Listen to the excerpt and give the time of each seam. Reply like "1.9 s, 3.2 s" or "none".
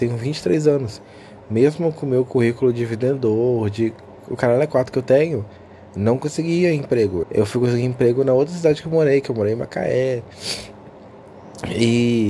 7.2 s